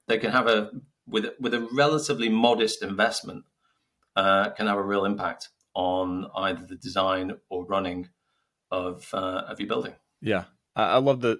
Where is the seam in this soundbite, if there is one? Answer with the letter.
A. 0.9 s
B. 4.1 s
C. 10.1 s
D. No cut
D